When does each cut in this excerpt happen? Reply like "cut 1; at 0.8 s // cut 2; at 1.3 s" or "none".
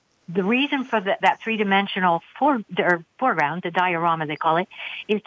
none